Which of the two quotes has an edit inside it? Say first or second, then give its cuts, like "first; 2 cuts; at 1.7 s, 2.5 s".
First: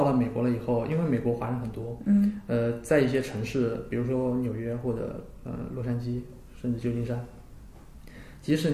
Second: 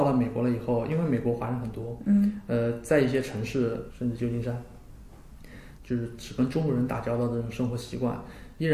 second; 2 cuts; at 3.9 s, 5.8 s